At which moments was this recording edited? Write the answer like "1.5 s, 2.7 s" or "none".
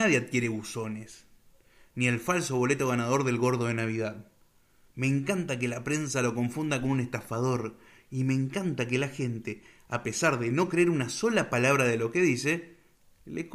4.9 s